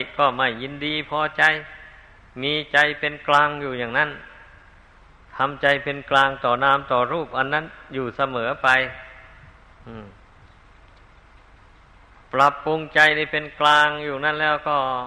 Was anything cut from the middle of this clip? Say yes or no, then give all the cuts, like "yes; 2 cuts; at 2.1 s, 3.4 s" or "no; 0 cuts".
no; 0 cuts